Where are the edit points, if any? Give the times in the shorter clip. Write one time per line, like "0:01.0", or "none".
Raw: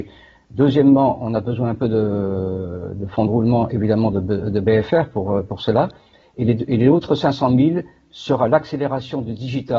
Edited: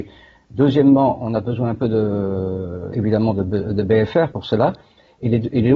0:02.9
0:04.3